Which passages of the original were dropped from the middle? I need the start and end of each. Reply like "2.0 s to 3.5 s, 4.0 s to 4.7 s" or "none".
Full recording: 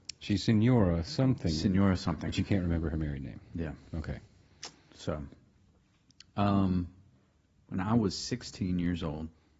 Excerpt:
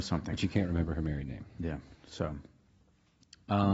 3.9 s to 4.8 s